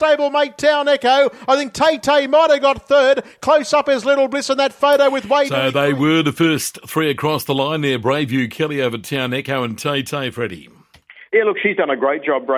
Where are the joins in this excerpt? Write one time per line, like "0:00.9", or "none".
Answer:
none